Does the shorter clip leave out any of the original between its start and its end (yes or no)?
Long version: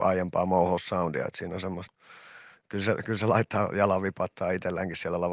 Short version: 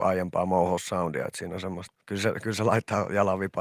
yes